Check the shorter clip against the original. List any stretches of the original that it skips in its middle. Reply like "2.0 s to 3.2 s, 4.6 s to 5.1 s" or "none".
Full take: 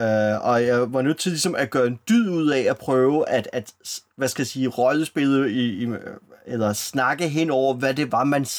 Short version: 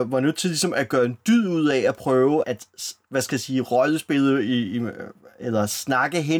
3.3 s to 3.5 s